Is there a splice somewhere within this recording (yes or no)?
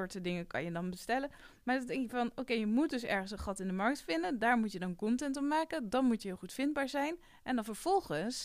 no